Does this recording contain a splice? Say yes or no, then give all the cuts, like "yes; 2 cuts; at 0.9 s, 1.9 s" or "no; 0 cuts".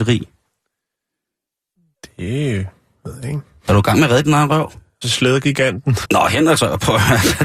yes; 2 cuts; at 5.0 s, 6.0 s